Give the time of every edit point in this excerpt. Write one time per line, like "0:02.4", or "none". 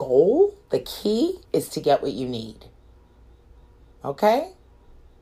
0:01.4